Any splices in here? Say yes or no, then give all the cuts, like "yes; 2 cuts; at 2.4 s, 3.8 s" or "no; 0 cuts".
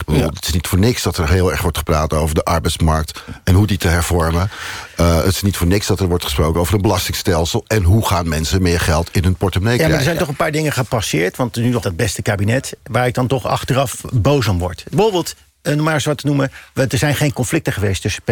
yes; 1 cut; at 11.8 s